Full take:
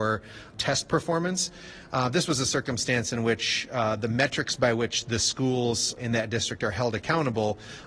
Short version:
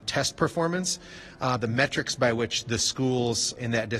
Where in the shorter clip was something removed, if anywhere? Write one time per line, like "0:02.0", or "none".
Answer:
0:01.6